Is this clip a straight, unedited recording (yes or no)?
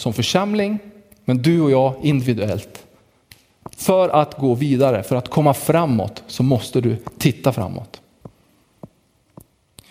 yes